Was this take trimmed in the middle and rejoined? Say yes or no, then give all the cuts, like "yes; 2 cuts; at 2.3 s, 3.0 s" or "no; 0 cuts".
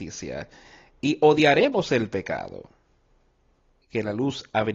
yes; 1 cut; at 3.8 s